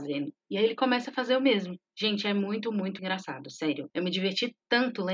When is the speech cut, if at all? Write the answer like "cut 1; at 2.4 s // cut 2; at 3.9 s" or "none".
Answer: cut 1; at 3.0 s

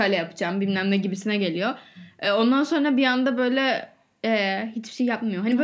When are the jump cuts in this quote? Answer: none

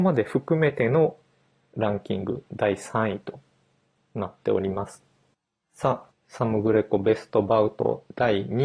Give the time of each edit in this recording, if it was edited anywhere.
cut 1; at 6.1 s

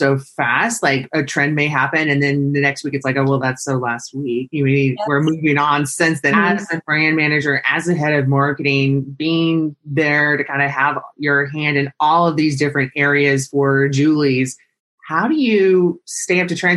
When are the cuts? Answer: cut 1; at 6.3 s

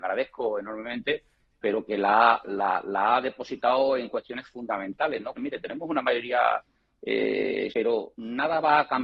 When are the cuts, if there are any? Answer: cut 1; at 5.4 s // cut 2; at 7.7 s

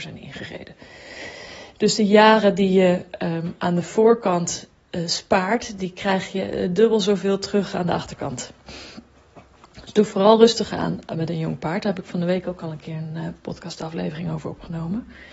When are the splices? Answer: none

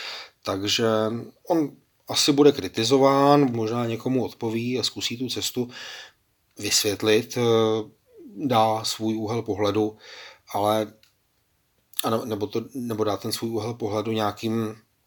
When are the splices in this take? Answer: cut 1; at 3.5 s

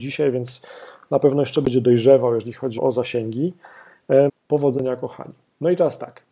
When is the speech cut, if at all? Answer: cut 1; at 2.8 s // cut 2; at 4.3 s

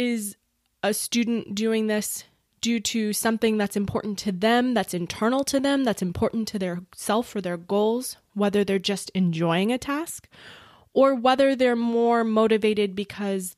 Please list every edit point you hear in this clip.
cut 1; at 8.3 s

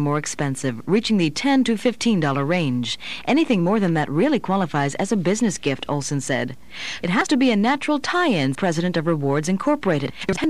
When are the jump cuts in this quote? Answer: cut 1; at 7.0 s // cut 2; at 8.6 s

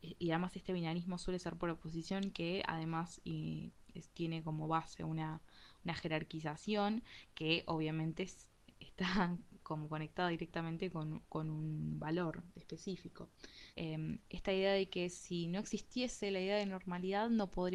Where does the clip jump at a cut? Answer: cut 1; at 13.7 s

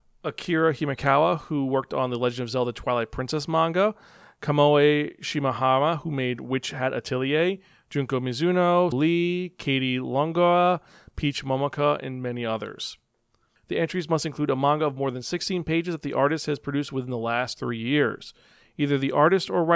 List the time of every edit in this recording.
cut 1; at 8.9 s // cut 2; at 13.6 s

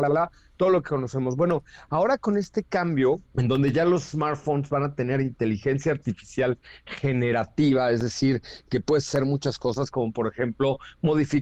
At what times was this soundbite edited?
cut 1; at 3.3 s

